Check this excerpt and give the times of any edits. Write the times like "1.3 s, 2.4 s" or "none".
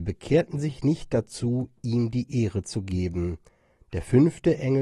none